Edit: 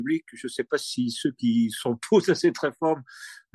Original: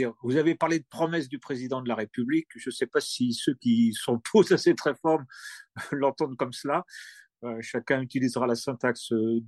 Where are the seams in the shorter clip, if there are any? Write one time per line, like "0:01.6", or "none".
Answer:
none